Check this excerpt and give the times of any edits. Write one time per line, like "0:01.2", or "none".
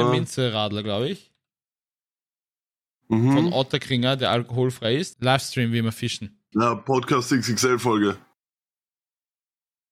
0:05.1
0:06.5